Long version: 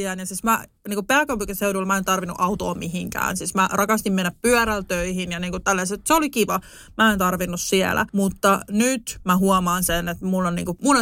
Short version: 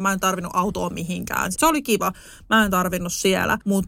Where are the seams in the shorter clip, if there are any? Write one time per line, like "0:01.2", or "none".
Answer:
0:01.5